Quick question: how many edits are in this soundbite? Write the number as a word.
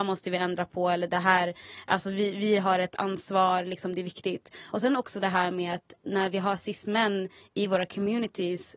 zero